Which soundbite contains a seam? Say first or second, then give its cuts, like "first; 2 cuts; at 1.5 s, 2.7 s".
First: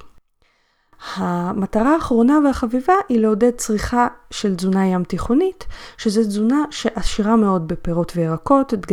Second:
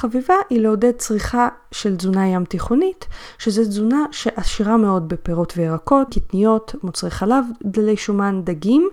second; 1 cut; at 6.1 s